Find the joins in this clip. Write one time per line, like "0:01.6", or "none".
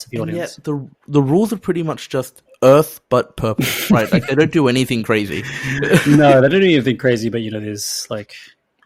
none